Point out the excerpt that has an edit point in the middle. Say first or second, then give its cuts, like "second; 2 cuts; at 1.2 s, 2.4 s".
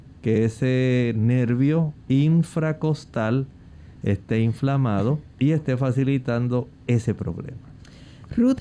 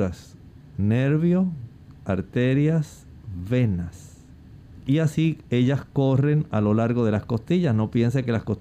first; 2 cuts; at 2.0 s, 5.3 s